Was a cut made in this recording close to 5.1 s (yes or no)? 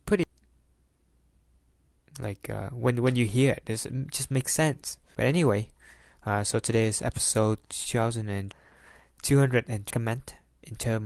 yes